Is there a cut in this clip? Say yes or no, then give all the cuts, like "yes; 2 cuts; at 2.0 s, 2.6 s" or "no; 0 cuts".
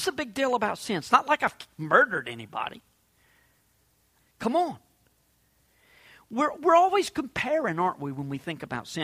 yes; 1 cut; at 4.2 s